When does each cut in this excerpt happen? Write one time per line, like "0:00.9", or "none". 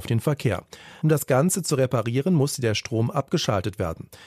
0:01.0